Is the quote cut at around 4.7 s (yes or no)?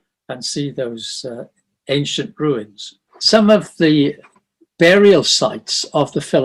no